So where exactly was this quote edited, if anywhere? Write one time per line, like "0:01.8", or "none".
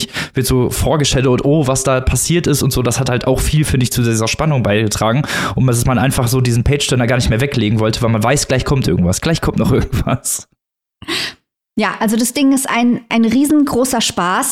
none